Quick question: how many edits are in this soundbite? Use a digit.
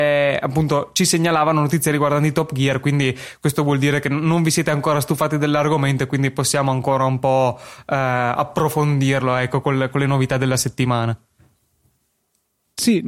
0